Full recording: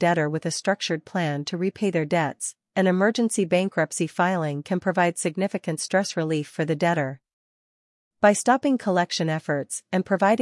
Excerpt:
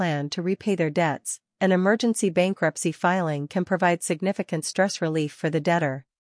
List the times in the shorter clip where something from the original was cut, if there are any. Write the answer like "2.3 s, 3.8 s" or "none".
none